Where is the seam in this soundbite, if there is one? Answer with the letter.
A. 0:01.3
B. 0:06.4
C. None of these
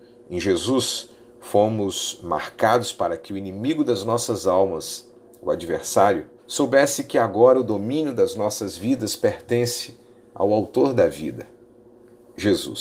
B